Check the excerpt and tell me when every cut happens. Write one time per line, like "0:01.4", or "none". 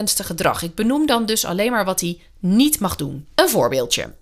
0:03.2